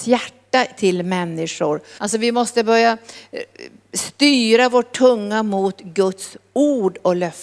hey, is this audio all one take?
no; 1 cut; at 2.0 s

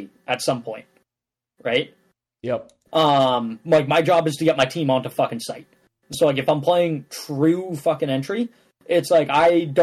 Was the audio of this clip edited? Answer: no; 0 cuts

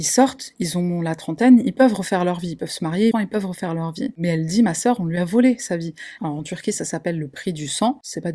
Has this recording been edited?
yes; 2 cuts; at 3.1 s, 6.2 s

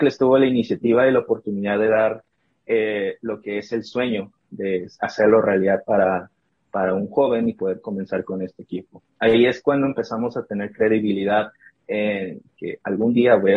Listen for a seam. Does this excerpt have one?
no; 0 cuts

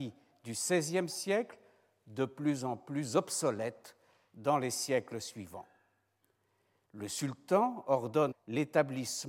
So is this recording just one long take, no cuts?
no; 2 cuts; at 6.9 s, 8.3 s

